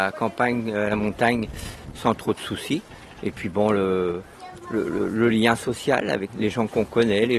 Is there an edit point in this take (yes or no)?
yes